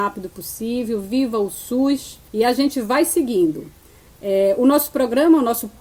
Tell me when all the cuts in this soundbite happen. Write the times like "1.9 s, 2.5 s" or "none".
2.3 s